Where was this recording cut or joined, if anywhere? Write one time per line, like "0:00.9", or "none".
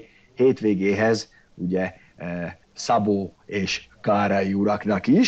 0:02.6